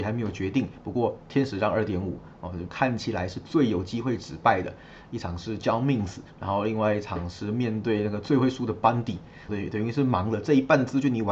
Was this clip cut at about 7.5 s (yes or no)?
no